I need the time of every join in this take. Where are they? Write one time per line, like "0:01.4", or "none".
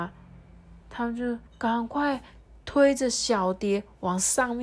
0:01.5